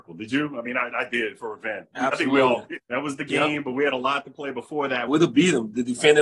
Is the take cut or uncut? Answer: cut